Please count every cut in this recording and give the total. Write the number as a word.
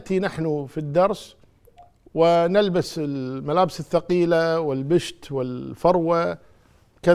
zero